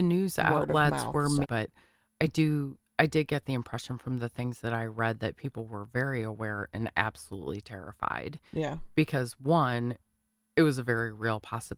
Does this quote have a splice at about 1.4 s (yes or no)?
yes